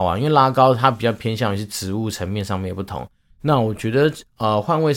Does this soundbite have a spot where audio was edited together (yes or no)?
yes